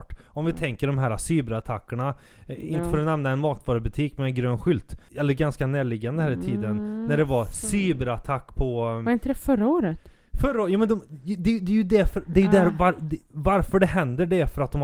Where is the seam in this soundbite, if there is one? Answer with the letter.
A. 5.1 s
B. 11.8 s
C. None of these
A